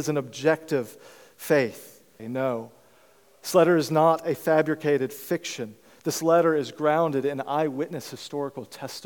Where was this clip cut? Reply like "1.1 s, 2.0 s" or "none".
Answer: 2.2 s

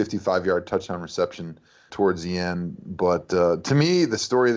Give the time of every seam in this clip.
1.9 s

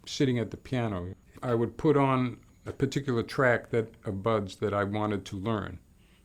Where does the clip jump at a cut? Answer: none

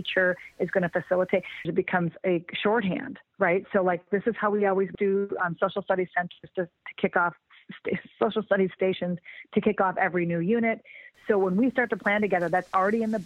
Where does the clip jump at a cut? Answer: 1.6 s, 4.9 s

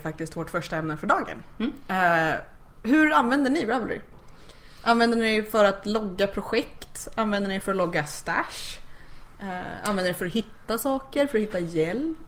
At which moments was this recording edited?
none

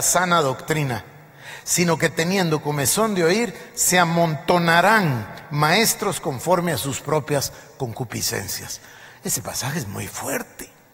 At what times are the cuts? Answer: none

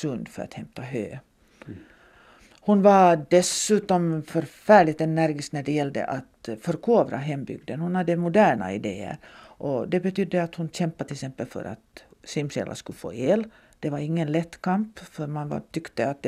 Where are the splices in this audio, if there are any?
none

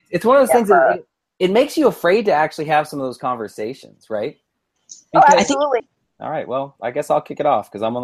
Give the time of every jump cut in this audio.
5.8 s

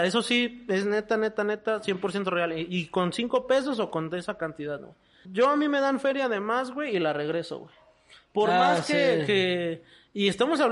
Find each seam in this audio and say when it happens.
5.2 s

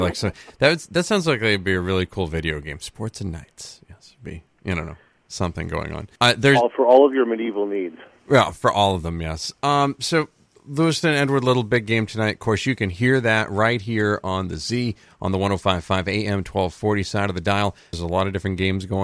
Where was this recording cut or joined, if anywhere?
6.2 s, 17.9 s

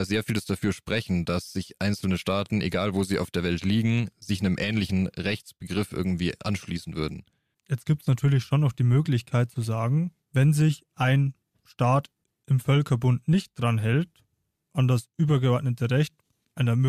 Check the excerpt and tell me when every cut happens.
none

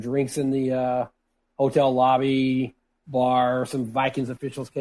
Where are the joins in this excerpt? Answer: none

